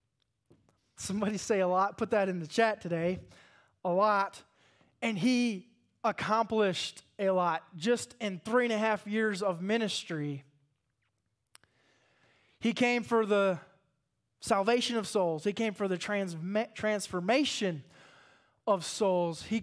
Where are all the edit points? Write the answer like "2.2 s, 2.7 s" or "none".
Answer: 1.0 s